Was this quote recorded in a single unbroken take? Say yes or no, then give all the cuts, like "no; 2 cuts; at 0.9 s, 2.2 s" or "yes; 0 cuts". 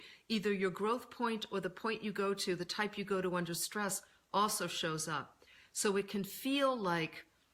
yes; 0 cuts